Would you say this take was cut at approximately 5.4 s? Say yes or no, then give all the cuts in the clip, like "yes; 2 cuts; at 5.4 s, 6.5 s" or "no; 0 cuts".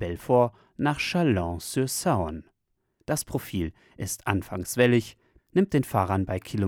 yes; 1 cut; at 5.4 s